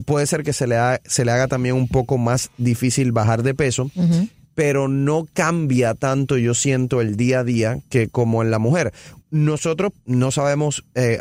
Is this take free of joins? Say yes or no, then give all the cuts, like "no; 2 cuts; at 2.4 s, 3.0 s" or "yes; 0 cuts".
no; 1 cut; at 9.9 s